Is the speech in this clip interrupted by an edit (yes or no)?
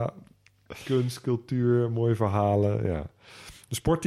no